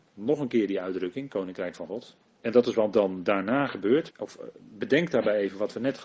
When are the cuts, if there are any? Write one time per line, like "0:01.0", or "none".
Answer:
0:02.3
0:04.1